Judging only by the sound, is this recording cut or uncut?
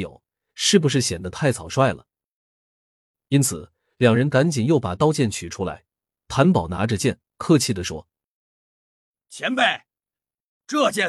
uncut